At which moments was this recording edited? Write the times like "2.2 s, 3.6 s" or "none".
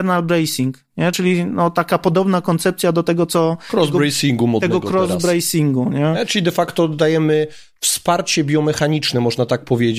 none